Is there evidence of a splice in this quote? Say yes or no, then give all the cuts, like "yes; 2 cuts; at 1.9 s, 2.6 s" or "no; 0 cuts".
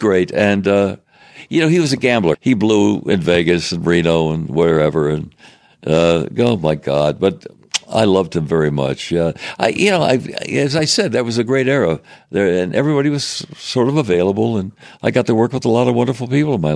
yes; 1 cut; at 2.3 s